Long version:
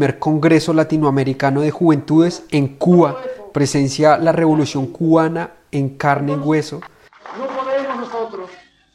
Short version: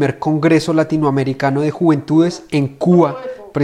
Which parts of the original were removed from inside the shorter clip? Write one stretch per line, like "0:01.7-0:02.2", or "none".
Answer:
none